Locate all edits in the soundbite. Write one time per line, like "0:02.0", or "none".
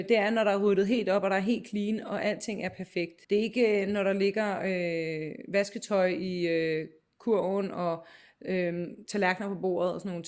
0:03.2
0:09.1